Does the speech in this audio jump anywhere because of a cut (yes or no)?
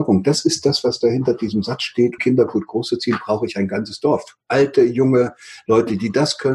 yes